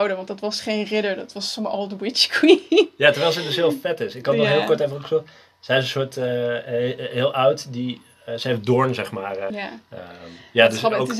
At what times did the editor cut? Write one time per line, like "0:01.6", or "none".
0:09.5